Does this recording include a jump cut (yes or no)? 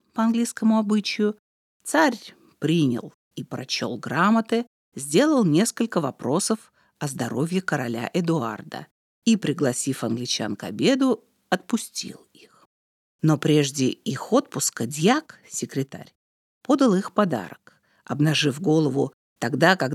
no